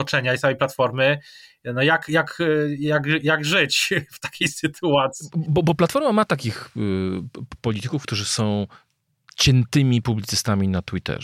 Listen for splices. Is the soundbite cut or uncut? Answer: uncut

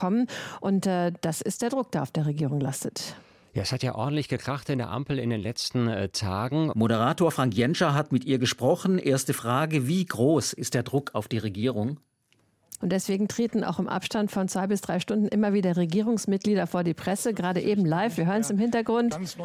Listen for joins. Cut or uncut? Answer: cut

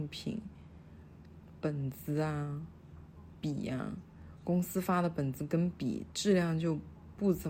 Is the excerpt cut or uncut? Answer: uncut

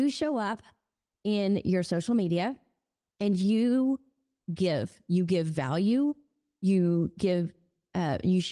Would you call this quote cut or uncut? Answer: uncut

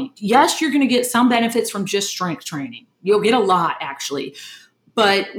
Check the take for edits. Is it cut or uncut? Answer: uncut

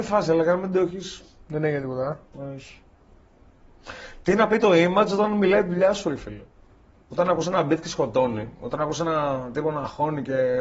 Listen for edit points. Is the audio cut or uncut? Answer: uncut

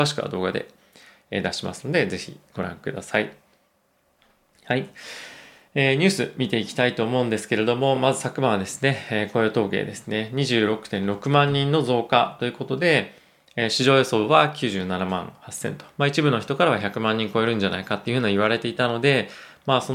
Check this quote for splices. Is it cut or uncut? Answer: uncut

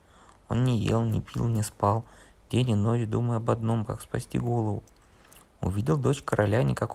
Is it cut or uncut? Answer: uncut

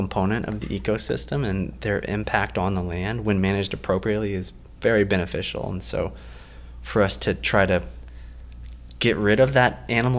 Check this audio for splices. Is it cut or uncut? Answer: uncut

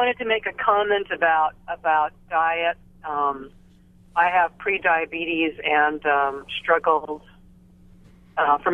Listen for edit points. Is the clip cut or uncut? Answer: uncut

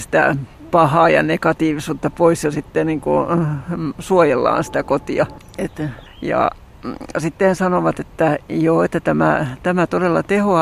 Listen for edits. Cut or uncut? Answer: cut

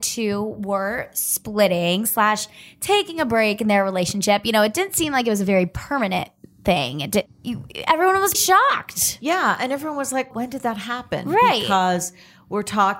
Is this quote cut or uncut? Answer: cut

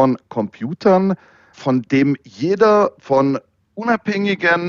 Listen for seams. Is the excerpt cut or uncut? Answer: cut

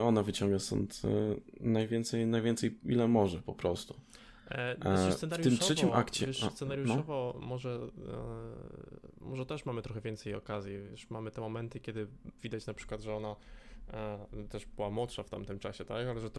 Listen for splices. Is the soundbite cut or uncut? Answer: uncut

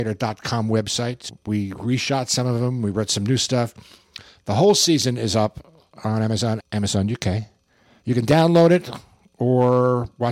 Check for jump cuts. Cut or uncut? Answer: cut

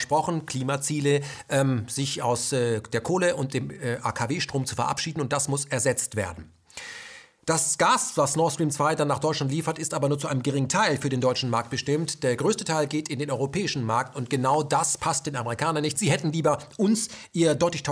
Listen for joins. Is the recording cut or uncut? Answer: uncut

